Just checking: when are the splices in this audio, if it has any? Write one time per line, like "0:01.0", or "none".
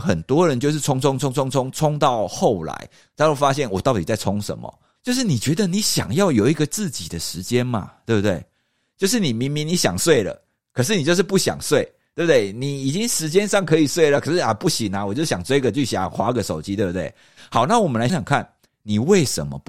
0:05.0
0:08.9
0:18.1